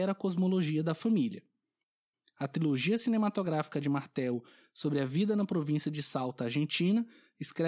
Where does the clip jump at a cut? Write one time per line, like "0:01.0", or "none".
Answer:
none